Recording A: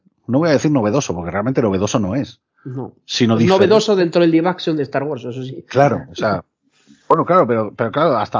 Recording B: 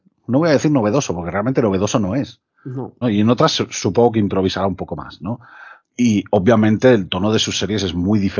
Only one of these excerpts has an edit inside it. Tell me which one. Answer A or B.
B